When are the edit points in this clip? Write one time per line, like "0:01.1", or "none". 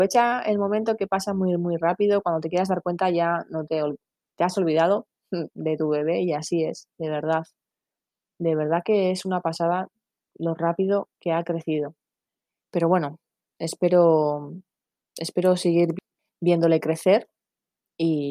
none